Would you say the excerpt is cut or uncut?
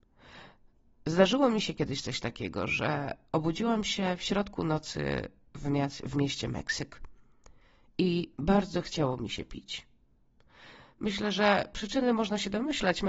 uncut